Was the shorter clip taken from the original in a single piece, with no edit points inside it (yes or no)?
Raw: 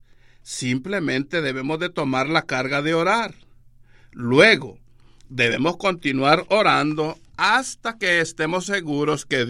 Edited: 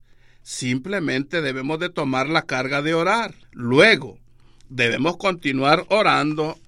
no